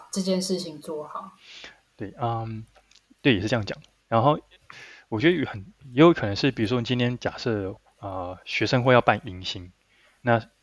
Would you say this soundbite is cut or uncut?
uncut